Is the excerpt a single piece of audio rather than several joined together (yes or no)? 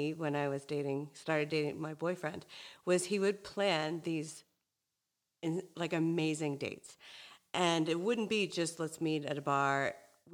yes